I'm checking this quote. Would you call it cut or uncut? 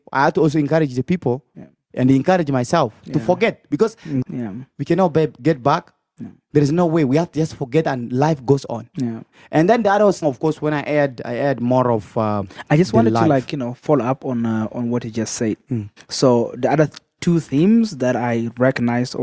cut